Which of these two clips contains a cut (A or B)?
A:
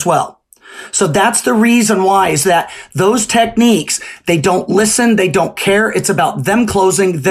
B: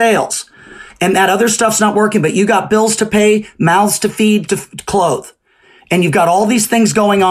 B